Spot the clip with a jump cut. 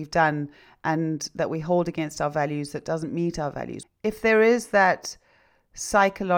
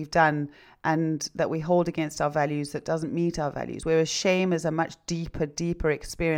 first; 1 cut; at 3.8 s

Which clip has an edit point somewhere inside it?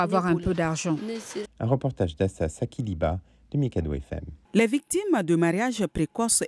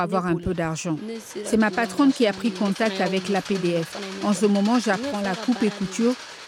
first; 1 cut; at 1.4 s

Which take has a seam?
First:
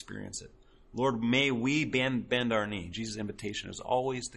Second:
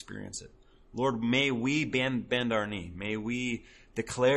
first; 1 cut; at 2.9 s

